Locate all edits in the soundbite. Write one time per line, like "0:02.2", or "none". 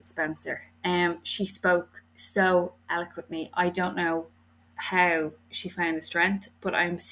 none